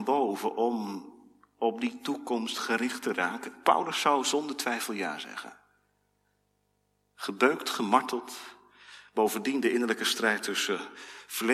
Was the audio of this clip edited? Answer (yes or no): no